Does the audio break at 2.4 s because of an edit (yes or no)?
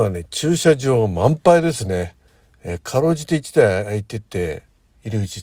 no